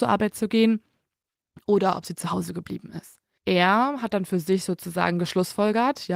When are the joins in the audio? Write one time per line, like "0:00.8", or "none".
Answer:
0:03.4